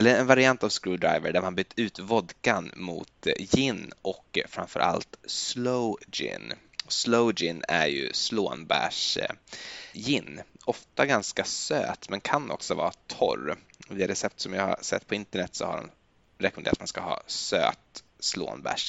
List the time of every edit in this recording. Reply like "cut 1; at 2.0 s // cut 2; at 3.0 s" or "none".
cut 1; at 9.9 s